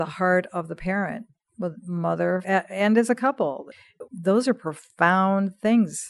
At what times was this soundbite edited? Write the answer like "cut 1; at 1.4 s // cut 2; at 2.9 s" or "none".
cut 1; at 2.4 s // cut 2; at 4.1 s